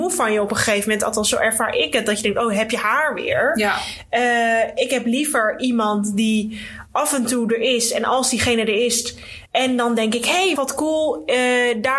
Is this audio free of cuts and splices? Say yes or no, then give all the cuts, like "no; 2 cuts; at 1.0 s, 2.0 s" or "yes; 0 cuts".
no; 2 cuts; at 9.5 s, 10.6 s